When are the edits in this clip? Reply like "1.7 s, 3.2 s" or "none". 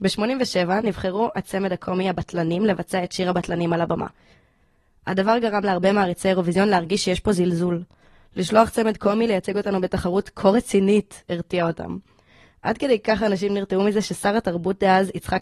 none